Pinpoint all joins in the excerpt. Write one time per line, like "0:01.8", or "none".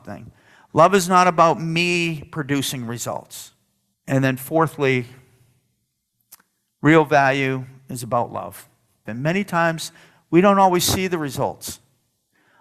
0:03.9
0:09.1